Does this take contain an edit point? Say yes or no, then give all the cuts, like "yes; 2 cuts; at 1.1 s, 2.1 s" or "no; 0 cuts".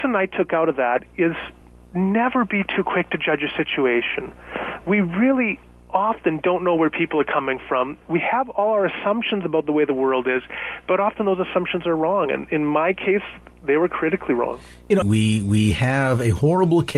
yes; 1 cut; at 15.0 s